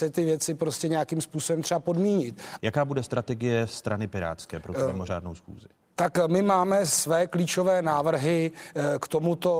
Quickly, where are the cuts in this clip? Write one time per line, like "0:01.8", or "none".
0:02.6